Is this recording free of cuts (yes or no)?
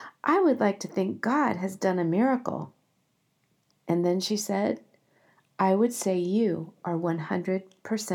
no